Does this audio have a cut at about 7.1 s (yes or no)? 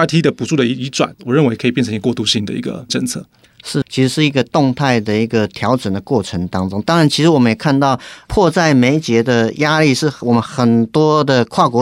no